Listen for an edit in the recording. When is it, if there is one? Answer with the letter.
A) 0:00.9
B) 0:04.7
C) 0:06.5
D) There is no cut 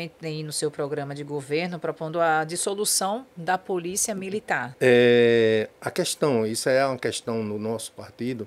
B